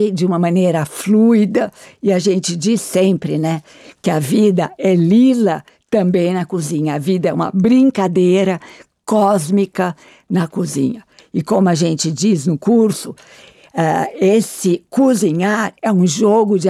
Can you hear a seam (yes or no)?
no